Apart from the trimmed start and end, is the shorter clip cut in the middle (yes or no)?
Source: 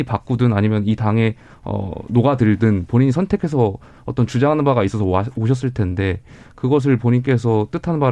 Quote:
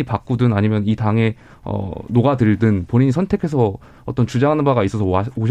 no